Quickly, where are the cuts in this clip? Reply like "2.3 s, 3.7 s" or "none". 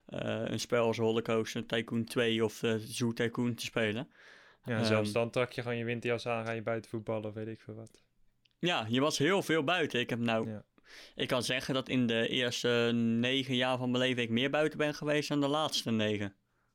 none